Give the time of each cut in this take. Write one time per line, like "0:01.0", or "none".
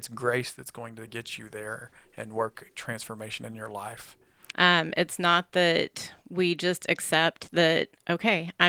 0:04.5